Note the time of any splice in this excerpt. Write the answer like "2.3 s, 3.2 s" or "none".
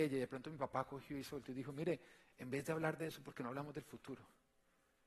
none

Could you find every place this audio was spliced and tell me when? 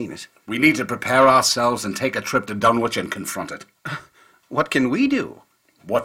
none

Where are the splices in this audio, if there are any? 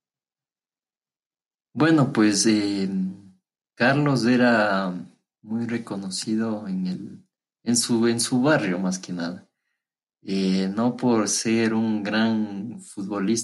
none

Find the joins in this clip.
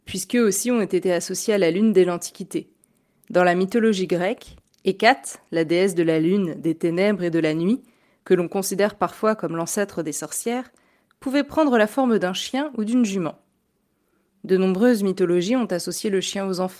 none

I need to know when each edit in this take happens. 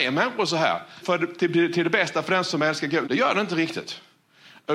1.0 s, 3.0 s

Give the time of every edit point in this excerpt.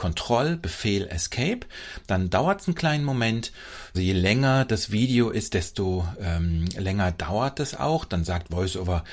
3.9 s

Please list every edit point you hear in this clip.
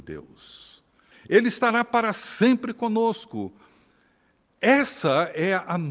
1.1 s

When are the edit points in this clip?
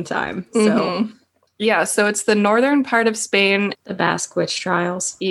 3.7 s

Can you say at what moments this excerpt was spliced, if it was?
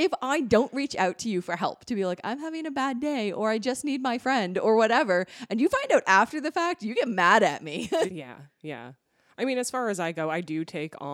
8.1 s

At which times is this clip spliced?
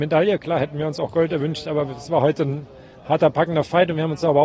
none

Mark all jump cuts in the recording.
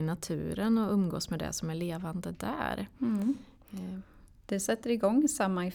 none

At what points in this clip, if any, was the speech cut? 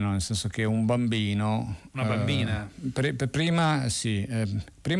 none

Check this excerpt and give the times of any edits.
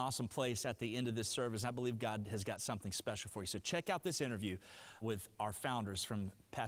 5.0 s

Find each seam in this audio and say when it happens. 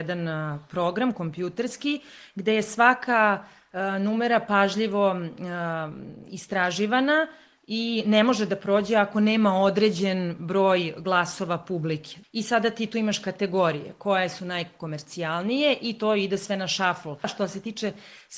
12.2 s, 17.2 s

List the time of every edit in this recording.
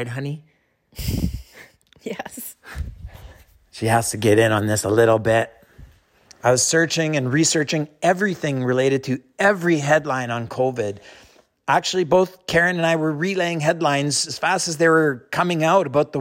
none

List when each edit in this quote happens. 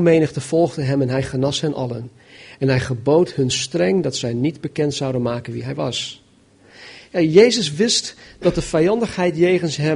none

